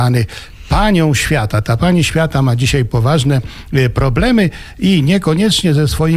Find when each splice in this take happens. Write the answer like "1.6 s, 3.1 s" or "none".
none